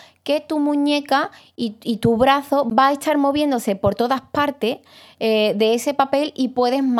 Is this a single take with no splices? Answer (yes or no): yes